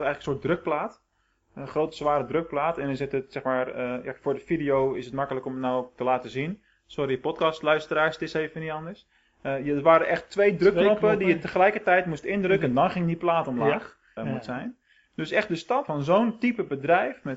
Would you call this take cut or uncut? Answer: cut